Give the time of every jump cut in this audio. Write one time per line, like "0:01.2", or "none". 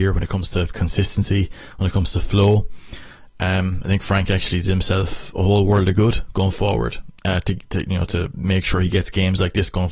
none